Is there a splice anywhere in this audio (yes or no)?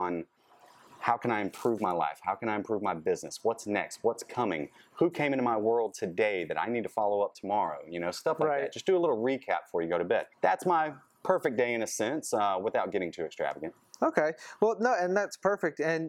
yes